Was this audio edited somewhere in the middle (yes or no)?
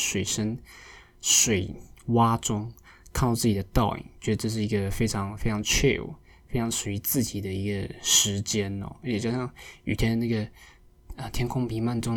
no